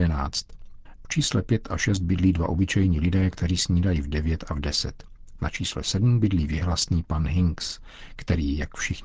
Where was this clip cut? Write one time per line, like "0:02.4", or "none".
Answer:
0:00.9